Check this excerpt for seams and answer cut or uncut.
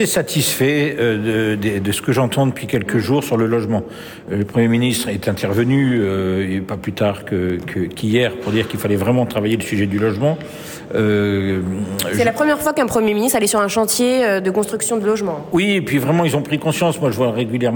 uncut